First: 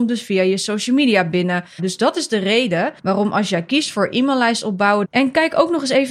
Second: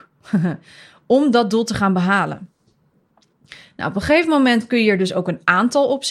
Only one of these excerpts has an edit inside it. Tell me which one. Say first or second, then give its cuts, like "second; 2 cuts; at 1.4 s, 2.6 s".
first; 3 cuts; at 1.8 s, 3.0 s, 5.0 s